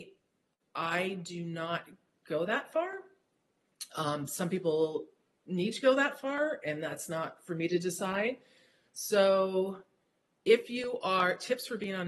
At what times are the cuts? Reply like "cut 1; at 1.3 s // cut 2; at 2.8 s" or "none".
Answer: none